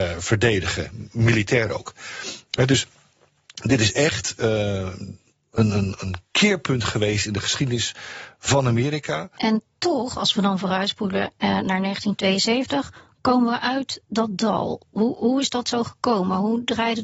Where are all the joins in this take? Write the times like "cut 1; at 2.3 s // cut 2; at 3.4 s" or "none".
none